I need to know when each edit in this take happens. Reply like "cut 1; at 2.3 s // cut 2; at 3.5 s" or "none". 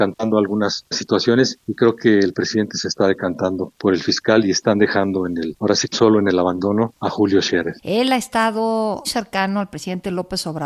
cut 1; at 5.9 s // cut 2; at 7.8 s // cut 3; at 9.0 s